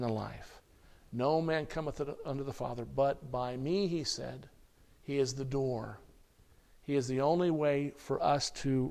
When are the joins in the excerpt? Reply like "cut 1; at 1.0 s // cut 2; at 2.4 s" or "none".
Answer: none